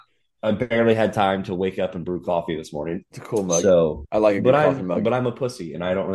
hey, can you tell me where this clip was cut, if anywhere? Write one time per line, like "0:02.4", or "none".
0:03.1